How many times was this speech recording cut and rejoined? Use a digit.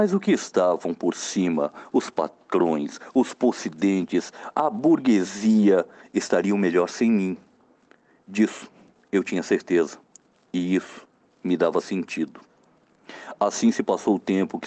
0